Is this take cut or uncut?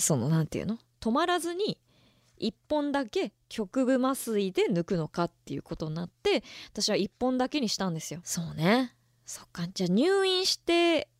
cut